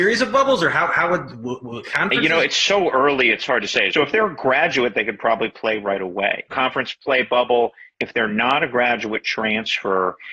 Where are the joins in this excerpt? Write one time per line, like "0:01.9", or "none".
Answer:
0:03.9
0:06.5
0:07.9